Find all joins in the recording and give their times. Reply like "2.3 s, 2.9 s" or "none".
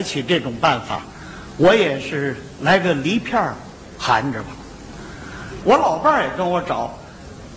5.6 s